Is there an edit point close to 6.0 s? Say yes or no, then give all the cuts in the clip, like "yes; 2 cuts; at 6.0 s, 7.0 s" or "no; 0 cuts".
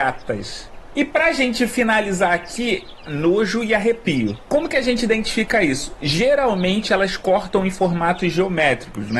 no; 2 cuts; at 3.1 s, 4.5 s